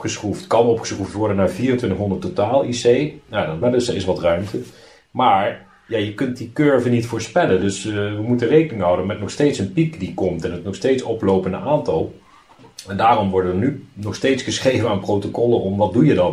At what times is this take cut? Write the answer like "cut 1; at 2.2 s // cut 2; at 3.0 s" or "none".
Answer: cut 1; at 3.6 s